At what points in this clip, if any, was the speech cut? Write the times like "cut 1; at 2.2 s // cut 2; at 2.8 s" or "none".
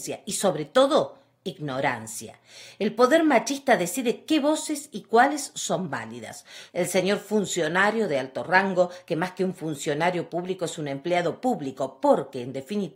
cut 1; at 6.7 s